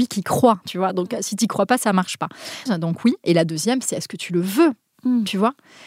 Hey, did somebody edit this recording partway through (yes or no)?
yes